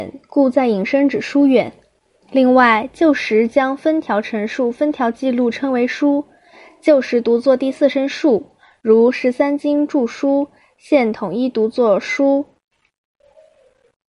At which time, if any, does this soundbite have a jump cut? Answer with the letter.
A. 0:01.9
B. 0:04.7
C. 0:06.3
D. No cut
D